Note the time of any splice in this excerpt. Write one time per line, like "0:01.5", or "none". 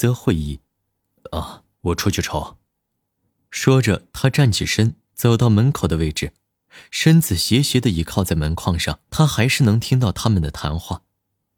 0:09.1